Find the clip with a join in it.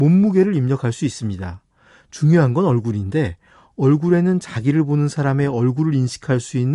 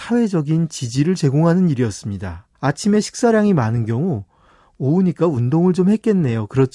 second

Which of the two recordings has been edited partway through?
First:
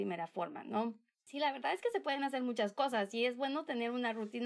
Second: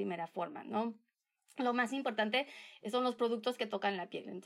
first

